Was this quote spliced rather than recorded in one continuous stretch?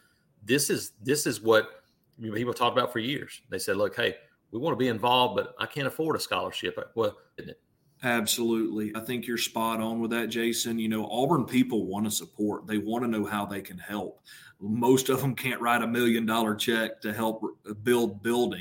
yes; 2 cuts; at 7.4 s, 8.9 s

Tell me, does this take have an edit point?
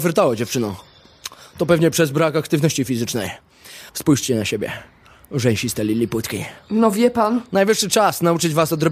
yes; 1 cut; at 3.9 s

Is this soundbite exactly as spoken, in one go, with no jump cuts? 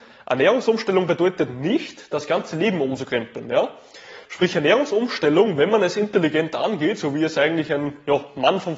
yes; 0 cuts

